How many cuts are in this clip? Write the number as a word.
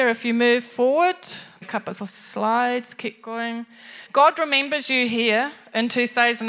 two